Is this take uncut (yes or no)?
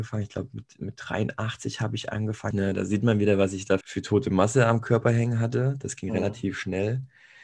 no